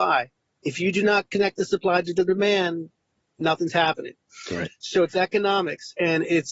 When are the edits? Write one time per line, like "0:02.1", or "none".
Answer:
none